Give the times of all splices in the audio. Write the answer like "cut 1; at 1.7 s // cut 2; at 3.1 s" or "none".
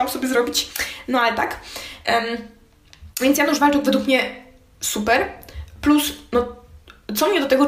cut 1; at 2.0 s